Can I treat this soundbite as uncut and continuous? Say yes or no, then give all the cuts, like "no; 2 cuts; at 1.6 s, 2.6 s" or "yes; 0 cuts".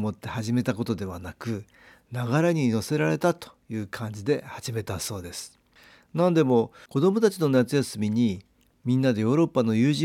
yes; 0 cuts